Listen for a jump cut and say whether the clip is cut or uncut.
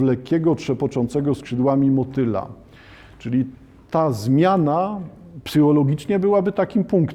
uncut